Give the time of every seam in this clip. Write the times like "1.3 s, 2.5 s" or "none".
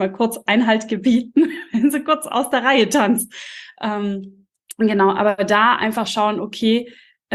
none

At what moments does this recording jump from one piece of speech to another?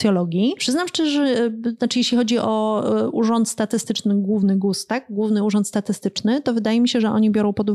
none

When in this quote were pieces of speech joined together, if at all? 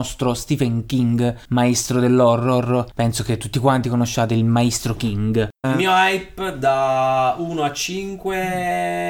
5.6 s

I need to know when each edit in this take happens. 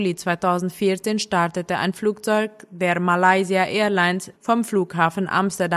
4.3 s

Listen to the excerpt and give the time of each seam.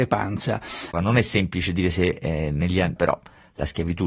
0.9 s, 3.0 s

